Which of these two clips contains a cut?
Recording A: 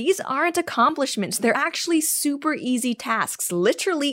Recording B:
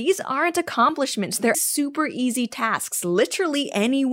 B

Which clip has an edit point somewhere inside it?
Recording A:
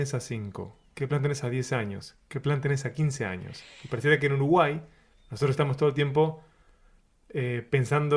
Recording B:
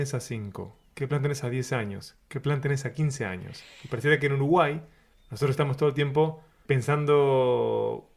B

